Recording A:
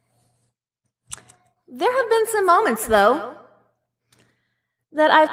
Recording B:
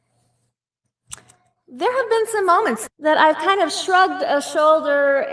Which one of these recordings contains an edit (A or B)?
B